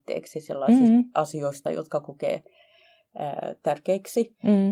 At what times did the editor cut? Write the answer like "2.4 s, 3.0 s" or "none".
none